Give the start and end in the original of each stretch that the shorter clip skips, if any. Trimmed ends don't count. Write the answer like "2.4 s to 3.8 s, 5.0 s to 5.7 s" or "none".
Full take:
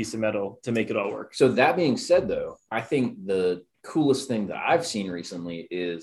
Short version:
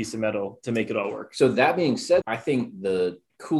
2.2 s to 2.7 s